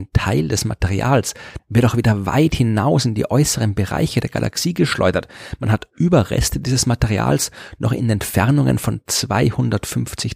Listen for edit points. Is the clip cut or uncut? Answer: cut